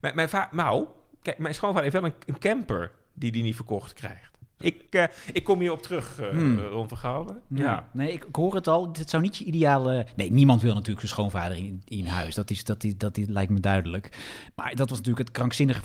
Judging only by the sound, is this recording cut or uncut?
cut